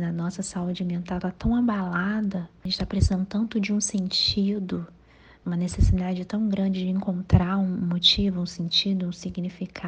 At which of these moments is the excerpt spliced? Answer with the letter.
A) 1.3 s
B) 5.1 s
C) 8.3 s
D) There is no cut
D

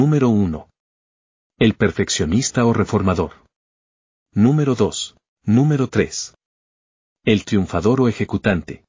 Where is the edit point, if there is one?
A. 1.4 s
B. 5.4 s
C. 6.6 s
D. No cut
B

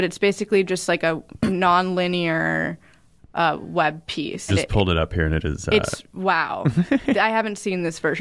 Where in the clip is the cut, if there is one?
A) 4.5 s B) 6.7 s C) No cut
A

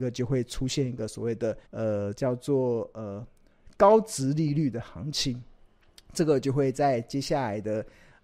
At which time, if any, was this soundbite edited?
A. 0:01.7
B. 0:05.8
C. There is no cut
A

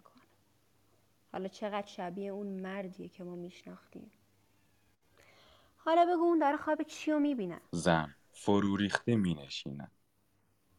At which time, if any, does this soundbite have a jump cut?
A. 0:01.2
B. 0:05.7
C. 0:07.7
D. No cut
C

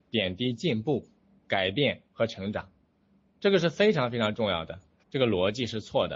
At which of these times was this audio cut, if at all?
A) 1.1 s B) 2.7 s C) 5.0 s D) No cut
C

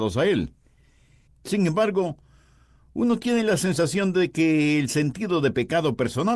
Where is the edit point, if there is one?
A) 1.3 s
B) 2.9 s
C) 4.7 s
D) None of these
A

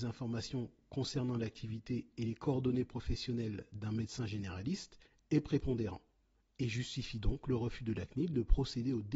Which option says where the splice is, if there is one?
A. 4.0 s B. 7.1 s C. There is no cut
C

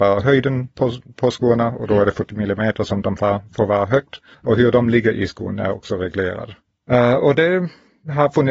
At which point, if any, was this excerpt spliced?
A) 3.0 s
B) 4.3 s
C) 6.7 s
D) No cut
B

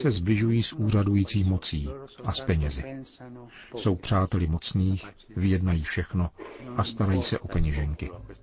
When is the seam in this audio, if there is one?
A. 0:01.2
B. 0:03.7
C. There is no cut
B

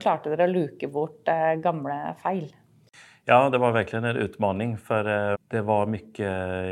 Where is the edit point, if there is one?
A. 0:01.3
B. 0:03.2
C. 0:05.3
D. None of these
C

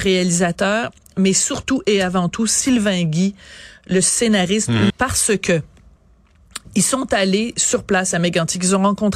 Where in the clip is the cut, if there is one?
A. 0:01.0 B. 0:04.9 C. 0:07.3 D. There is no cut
B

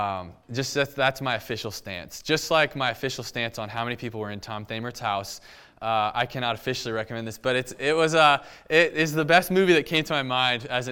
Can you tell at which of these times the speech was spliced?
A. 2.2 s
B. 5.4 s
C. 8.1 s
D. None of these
D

